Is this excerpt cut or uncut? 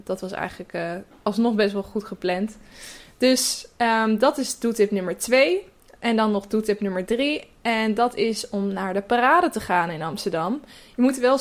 uncut